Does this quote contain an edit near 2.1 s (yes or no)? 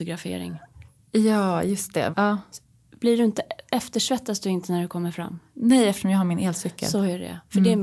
yes